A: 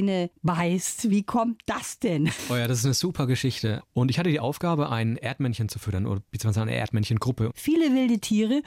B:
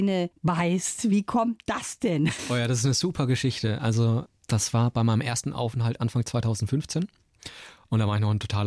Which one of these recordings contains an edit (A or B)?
A